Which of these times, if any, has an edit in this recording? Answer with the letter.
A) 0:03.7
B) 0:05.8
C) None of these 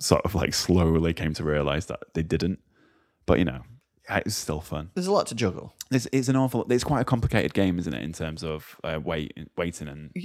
C